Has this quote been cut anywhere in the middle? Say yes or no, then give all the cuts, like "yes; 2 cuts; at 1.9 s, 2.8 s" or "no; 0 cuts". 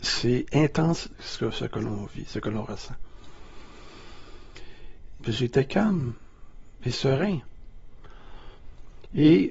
yes; 1 cut; at 5.2 s